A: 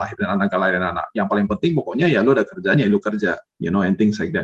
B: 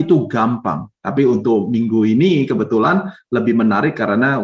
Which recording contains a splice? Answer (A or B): B